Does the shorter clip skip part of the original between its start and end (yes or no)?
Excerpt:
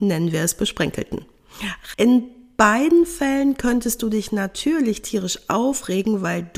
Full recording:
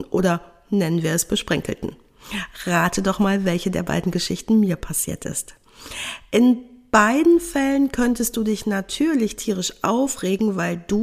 yes